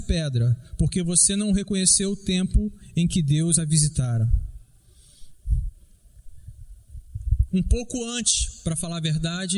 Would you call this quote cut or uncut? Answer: cut